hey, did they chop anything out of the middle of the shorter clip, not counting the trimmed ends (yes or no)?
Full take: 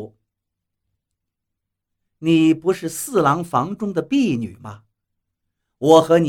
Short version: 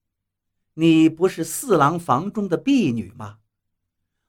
no